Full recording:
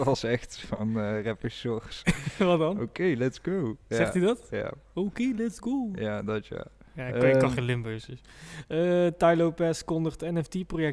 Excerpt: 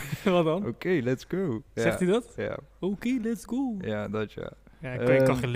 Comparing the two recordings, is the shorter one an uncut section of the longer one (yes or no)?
yes